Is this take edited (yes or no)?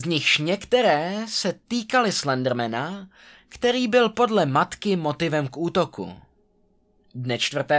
no